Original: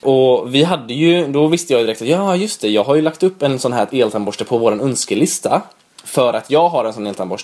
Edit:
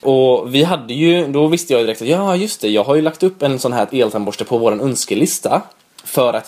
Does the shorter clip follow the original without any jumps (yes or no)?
yes